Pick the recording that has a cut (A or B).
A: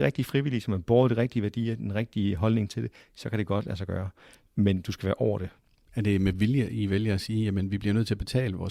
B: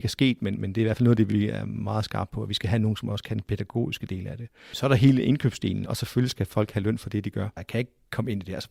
B